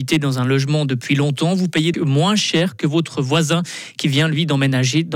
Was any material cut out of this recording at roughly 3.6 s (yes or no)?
no